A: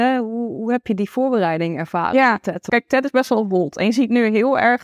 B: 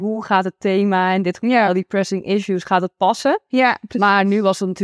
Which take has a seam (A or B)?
A